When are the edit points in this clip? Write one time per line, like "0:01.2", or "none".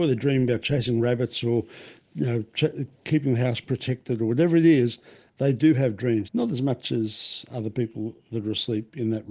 0:06.2